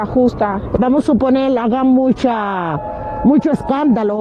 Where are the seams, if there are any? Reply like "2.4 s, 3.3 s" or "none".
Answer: none